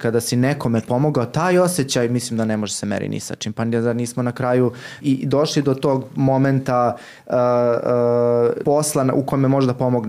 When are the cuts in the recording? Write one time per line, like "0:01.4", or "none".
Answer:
0:05.0
0:08.6